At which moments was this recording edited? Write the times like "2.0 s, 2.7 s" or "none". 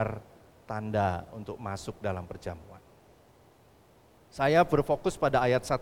4.2 s